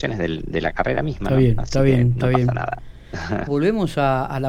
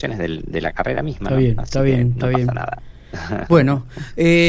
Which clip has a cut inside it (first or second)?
first